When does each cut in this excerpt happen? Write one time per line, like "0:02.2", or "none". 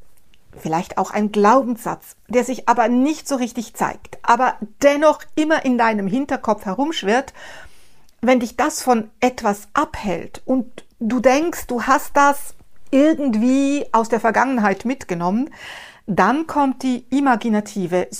none